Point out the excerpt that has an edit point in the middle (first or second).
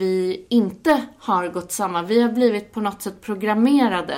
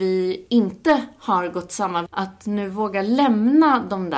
second